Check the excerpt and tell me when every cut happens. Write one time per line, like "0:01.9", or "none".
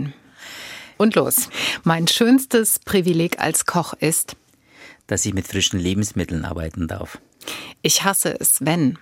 0:00.9